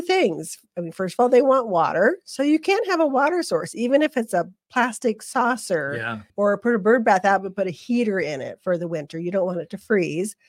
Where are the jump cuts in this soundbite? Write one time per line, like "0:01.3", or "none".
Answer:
0:06.3